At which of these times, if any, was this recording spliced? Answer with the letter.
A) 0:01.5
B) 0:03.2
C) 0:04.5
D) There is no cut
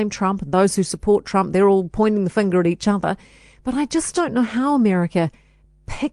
D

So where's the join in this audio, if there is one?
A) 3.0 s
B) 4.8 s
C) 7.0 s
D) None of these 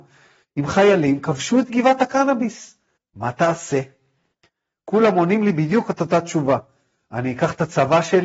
A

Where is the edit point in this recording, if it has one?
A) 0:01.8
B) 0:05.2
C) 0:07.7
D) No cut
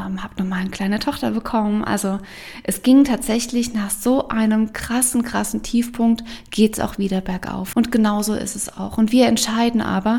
C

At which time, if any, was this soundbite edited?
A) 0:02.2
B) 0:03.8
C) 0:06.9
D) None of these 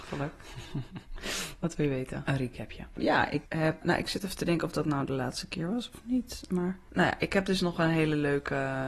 A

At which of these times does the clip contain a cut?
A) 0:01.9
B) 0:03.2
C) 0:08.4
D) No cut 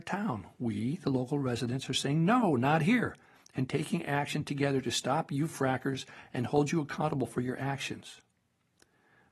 D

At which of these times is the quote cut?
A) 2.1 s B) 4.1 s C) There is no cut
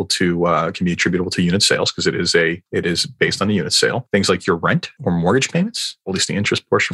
C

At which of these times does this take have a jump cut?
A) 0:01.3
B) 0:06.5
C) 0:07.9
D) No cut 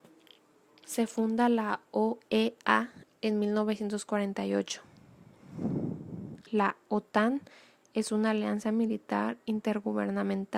B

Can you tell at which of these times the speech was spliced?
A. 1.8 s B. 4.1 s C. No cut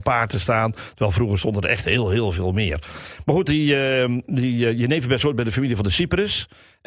C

